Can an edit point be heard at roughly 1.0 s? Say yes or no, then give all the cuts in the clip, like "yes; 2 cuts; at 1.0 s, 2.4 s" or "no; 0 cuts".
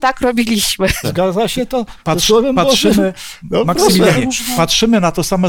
yes; 1 cut; at 1.0 s